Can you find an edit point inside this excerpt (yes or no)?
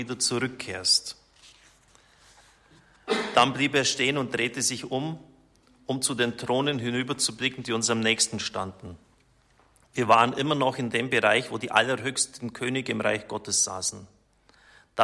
no